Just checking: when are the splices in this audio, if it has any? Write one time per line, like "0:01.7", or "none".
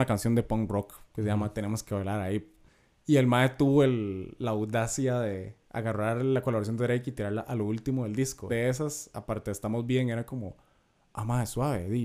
0:08.5